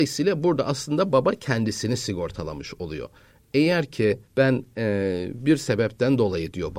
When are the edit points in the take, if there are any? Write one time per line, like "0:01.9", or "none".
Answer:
0:04.3

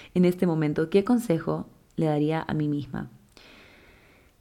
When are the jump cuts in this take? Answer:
none

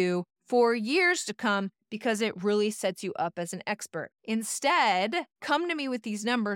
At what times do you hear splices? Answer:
0:04.1
0:05.4

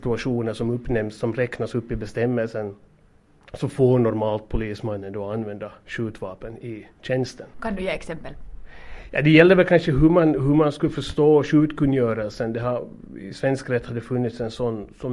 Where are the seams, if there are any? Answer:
0:07.5

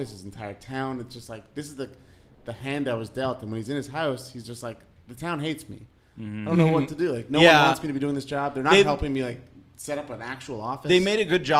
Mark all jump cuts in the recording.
none

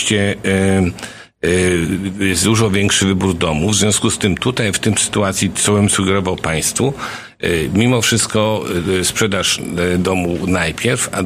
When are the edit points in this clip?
0:05.6

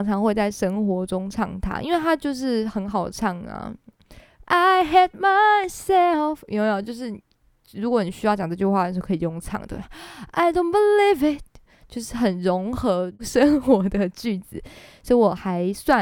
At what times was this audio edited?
none

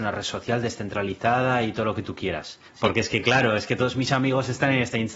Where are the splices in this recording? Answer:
0:02.7

